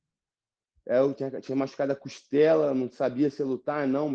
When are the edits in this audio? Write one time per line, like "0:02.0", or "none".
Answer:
0:01.1